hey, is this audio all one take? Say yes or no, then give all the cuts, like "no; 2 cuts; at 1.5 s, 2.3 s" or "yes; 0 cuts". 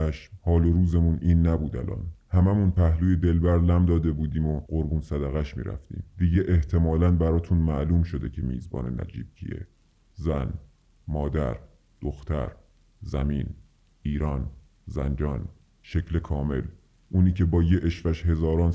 yes; 0 cuts